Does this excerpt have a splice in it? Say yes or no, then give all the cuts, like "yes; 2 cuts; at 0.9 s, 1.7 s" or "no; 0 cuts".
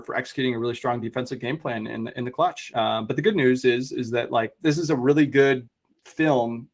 no; 0 cuts